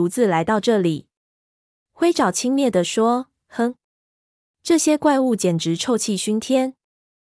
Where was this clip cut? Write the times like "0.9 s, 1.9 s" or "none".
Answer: 1.8 s